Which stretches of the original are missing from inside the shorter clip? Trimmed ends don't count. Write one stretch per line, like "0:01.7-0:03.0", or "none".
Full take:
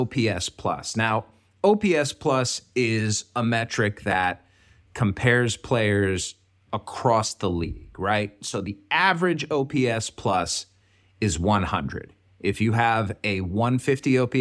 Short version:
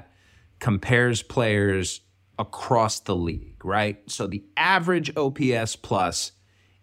none